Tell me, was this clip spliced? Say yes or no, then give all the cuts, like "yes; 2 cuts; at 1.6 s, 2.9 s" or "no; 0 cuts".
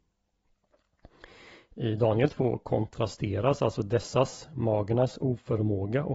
no; 0 cuts